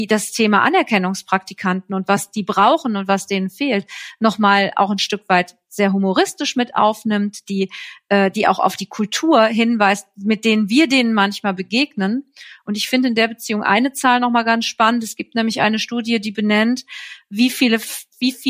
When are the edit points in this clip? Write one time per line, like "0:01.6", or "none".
none